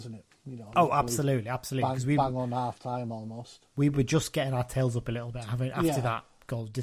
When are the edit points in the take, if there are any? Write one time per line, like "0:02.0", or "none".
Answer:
none